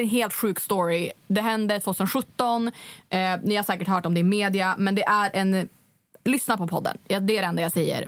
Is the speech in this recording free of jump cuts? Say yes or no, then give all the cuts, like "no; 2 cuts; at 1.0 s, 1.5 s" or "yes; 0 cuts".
yes; 0 cuts